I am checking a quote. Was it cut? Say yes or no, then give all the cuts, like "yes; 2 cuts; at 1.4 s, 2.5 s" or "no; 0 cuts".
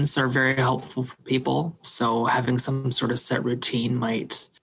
no; 0 cuts